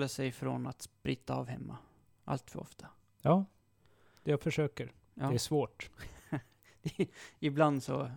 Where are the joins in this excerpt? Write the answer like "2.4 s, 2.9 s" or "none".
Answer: none